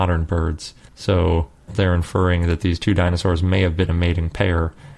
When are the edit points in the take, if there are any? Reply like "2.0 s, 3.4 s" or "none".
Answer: 1.7 s